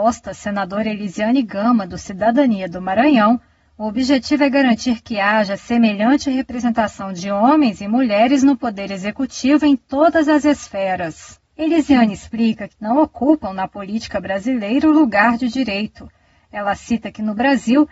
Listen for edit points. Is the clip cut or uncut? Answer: cut